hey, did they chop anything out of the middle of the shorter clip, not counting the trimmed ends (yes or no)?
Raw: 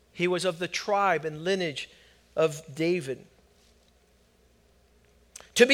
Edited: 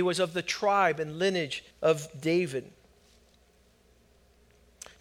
yes